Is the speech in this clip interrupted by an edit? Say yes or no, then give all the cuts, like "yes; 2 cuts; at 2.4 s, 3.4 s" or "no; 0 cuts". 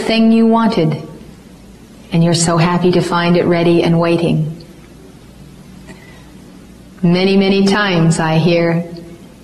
no; 0 cuts